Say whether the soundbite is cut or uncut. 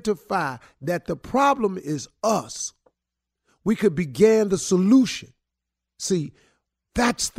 uncut